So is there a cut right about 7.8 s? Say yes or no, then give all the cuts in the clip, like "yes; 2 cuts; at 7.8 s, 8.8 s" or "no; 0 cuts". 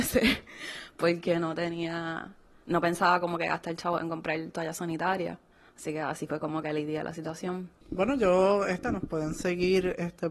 yes; 2 cuts; at 7.8 s, 8.8 s